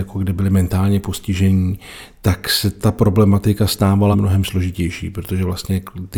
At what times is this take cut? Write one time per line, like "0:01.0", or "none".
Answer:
0:04.1